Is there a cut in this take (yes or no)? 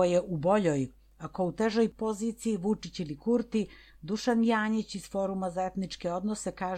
no